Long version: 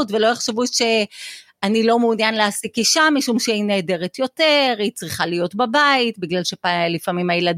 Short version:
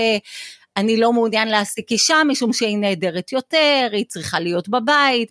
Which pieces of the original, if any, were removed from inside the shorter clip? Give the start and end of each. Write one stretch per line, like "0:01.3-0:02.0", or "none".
none